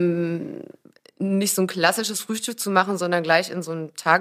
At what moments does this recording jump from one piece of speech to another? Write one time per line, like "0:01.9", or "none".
none

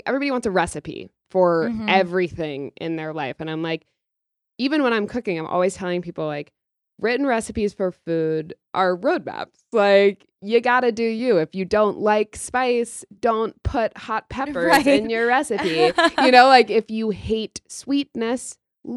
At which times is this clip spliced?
none

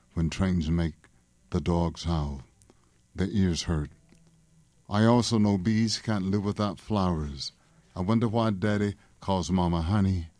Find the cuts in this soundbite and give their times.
none

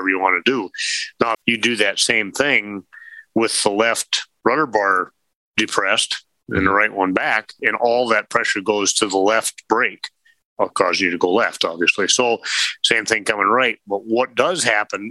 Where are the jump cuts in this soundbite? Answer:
0:01.3

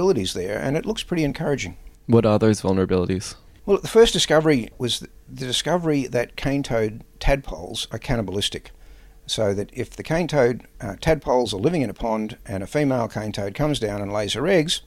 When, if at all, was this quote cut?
none

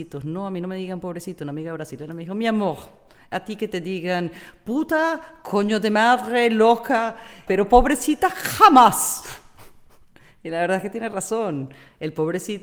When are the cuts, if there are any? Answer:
0:07.5

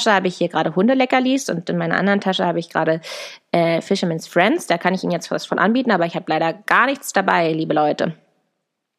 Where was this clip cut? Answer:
none

